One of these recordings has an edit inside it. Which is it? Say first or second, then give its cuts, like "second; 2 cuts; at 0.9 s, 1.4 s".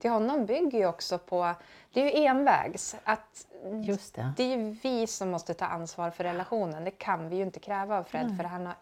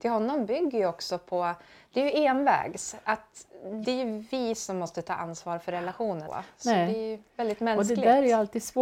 second; 2 cuts; at 3.8 s, 6.3 s